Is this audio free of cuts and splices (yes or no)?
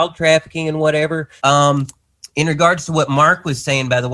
no